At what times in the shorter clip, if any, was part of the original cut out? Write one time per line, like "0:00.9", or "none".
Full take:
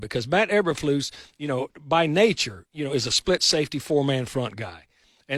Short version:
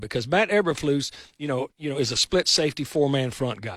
0:01.7